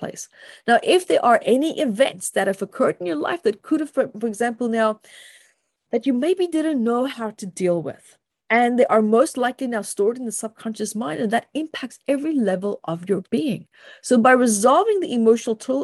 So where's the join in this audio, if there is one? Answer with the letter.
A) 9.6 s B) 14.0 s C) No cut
C